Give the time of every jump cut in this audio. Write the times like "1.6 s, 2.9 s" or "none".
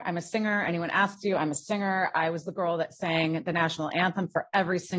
none